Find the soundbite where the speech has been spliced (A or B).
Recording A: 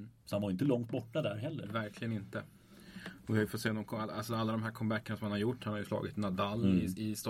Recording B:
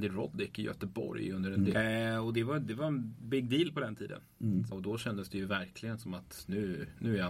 B